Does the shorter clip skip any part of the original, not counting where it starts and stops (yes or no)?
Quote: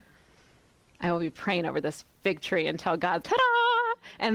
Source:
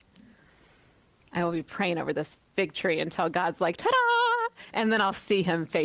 yes